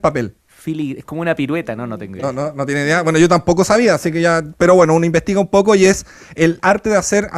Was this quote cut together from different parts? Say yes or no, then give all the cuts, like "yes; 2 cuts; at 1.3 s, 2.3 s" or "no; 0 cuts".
no; 0 cuts